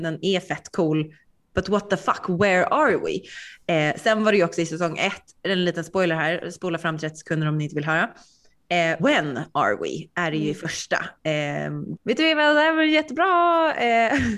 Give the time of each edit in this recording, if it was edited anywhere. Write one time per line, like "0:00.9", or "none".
0:09.0
0:12.0